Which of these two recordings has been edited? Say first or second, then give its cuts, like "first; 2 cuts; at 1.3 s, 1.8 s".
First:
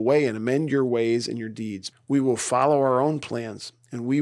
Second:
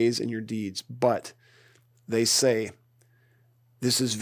first; 1 cut; at 1.9 s